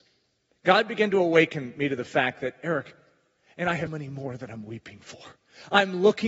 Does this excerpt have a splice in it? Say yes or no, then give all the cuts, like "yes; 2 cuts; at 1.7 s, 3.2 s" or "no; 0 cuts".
yes; 1 cut; at 3.9 s